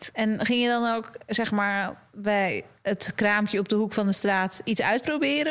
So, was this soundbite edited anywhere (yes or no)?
no